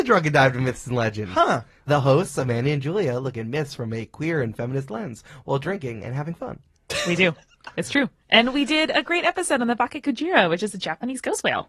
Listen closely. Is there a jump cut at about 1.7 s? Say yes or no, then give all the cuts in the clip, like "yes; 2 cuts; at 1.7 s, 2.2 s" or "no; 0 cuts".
no; 0 cuts